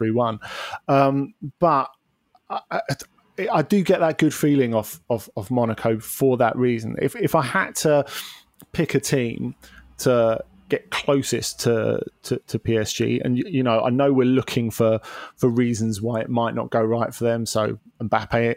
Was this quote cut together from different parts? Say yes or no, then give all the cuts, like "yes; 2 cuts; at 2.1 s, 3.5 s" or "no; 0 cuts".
no; 0 cuts